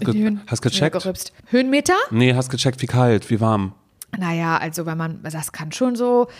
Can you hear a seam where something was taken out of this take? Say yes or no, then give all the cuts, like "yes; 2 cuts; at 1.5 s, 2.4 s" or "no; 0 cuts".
yes; 1 cut; at 1.4 s